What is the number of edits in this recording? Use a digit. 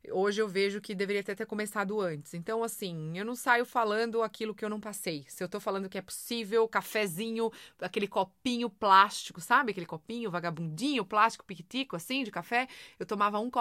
0